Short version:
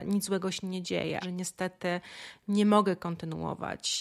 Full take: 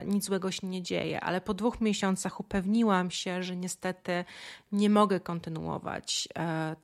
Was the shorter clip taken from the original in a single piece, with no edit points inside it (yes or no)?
no